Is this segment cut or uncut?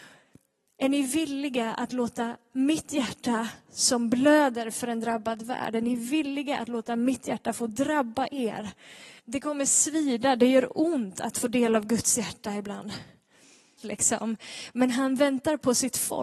cut